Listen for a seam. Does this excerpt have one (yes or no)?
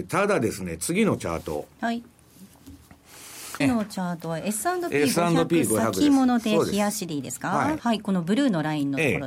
yes